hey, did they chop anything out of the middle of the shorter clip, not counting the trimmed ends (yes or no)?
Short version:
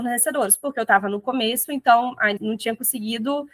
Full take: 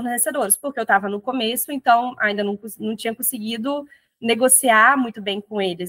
yes